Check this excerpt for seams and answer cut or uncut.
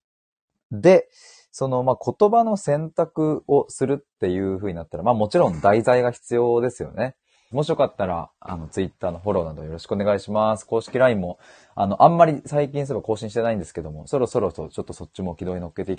cut